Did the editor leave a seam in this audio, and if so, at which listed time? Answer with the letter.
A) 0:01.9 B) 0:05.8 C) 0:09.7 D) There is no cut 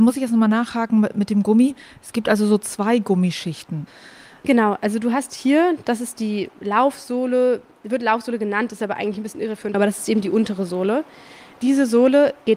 C